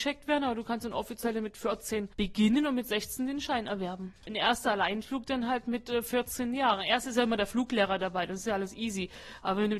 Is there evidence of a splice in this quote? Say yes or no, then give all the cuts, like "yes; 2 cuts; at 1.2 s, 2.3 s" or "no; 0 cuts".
yes; 1 cut; at 4.2 s